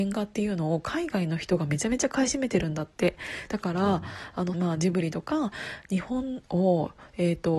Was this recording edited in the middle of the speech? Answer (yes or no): yes